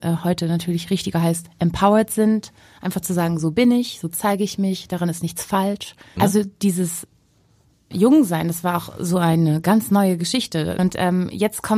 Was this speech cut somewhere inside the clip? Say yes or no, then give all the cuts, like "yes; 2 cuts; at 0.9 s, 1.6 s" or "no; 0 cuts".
yes; 2 cuts; at 6.2 s, 10.8 s